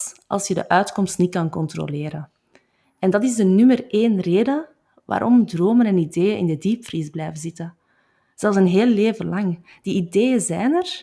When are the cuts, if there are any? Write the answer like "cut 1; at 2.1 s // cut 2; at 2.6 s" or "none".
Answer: cut 1; at 2.8 s